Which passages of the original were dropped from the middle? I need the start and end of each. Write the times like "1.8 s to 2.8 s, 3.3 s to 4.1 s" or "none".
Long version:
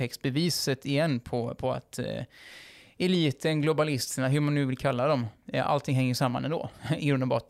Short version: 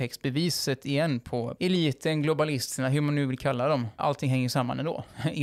1.6 s to 2.9 s, 5.4 s to 5.6 s